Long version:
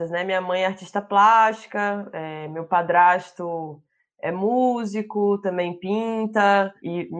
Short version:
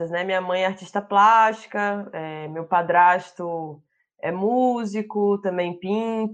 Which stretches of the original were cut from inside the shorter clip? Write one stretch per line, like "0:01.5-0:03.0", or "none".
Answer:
none

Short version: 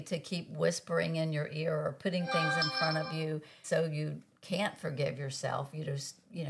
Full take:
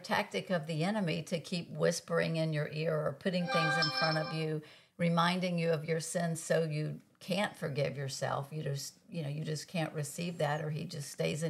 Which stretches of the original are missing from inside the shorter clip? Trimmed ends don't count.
0:04.8-0:06.4

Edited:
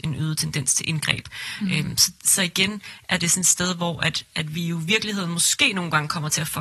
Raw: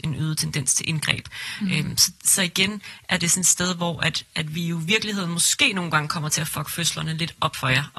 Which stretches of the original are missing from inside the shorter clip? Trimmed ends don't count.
none

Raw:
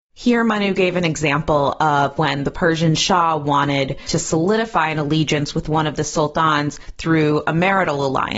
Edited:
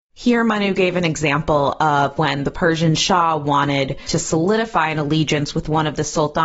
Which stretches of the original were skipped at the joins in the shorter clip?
none

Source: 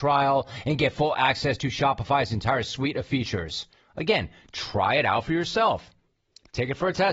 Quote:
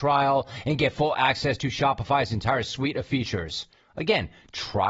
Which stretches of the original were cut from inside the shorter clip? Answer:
none

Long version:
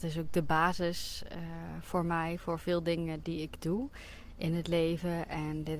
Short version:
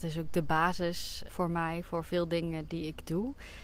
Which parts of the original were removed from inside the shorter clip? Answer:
0:01.3-0:01.8

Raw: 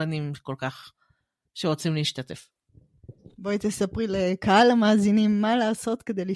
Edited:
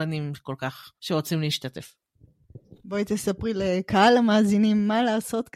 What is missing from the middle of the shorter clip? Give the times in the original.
0:01.0-0:01.5

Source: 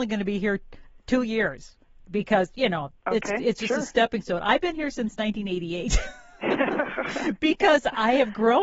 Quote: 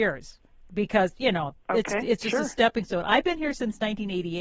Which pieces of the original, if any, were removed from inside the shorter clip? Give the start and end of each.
none

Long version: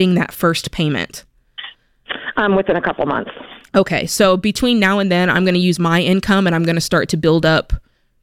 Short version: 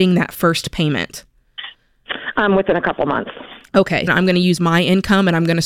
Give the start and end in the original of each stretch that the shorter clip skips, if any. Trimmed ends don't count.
0:04.1-0:05.3

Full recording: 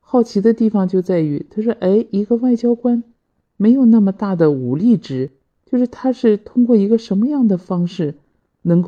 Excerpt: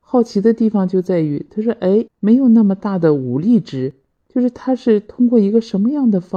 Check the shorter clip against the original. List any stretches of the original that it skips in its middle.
0:02.1-0:03.4

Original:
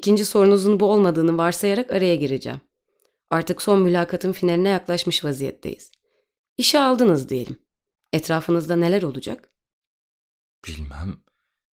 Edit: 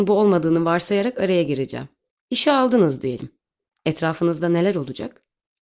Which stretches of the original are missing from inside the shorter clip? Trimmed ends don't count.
0:02.8-0:06.4

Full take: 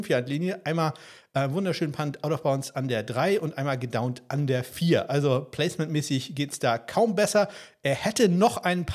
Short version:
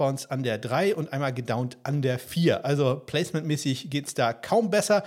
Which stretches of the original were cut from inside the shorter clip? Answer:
none

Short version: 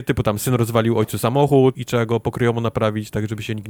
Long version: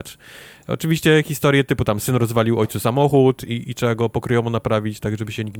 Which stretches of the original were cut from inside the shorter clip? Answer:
0:03.4-0:03.6

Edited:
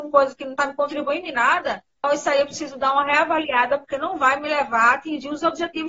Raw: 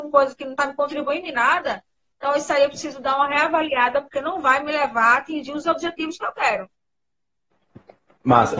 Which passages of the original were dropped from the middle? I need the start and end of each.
0:02.0-0:02.3

